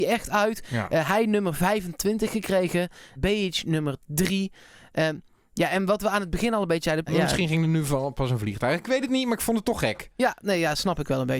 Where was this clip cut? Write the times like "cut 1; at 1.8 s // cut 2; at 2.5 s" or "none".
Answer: cut 1; at 3.2 s // cut 2; at 7.1 s